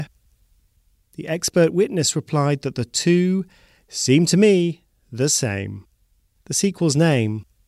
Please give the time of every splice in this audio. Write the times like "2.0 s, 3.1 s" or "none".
6.4 s

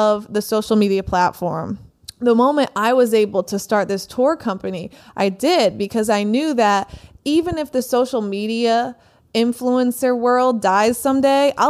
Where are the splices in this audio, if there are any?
none

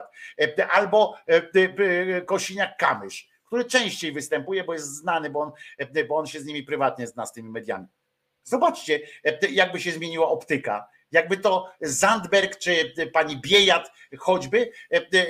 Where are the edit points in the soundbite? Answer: 8.4 s

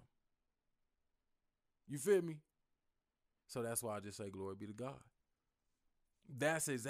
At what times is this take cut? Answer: none

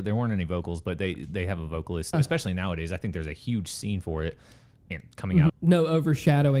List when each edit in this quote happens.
2.1 s, 5.5 s

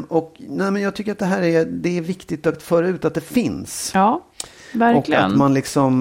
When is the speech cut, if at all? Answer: none

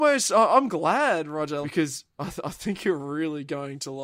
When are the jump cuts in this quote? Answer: 1.6 s

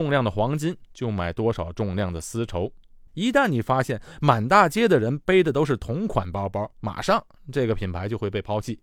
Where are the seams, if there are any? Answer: 3.1 s, 6.7 s

